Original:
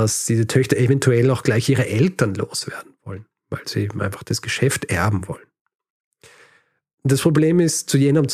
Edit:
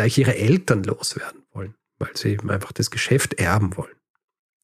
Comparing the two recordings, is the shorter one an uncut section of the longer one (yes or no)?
yes